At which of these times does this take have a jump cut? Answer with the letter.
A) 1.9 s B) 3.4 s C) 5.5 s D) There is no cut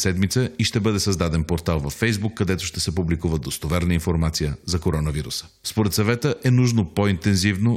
D